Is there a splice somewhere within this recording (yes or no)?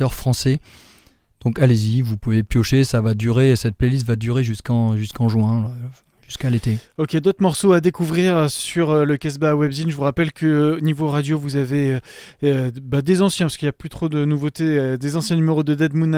no